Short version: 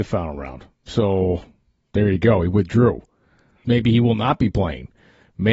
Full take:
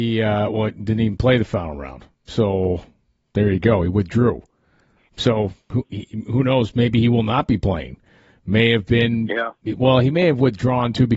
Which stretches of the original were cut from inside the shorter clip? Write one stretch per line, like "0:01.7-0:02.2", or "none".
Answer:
0:05.1-0:06.7